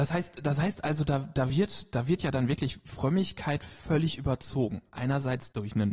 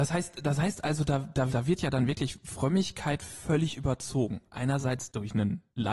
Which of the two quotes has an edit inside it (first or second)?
second